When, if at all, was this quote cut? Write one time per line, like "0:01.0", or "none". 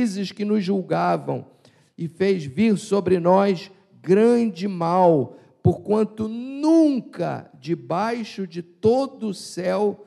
none